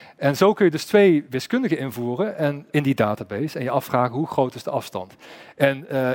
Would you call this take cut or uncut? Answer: cut